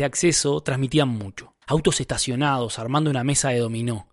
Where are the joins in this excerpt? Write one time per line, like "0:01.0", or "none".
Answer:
0:01.6